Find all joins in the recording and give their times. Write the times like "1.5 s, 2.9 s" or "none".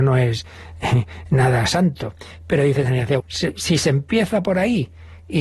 3.2 s

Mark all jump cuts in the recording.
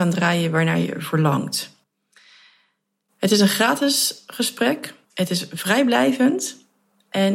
5.0 s

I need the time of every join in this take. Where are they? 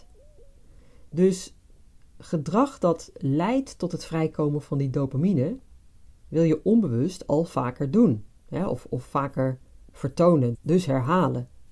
10.5 s

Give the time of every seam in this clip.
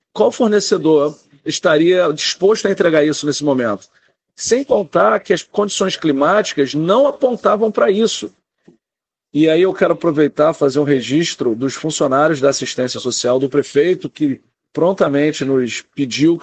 none

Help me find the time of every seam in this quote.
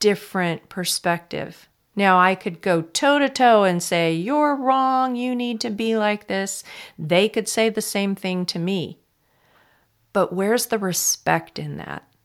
none

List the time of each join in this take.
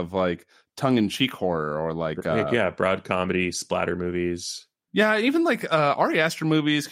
none

